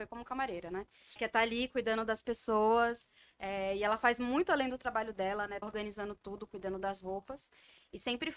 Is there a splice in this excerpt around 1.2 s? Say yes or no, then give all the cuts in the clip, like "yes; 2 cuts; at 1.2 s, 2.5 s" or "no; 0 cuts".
yes; 2 cuts; at 1.2 s, 5.6 s